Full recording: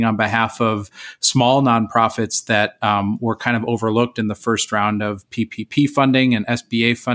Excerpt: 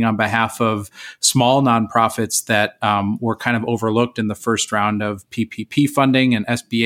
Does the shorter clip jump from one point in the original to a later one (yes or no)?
no